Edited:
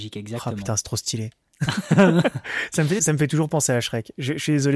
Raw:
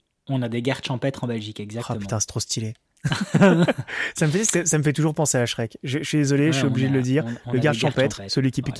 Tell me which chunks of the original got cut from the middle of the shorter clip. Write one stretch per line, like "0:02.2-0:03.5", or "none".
0:04.4-0:04.6